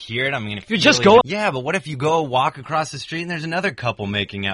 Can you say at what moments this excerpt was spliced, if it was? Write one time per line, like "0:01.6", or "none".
0:01.2